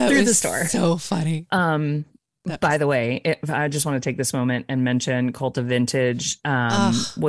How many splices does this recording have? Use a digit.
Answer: 0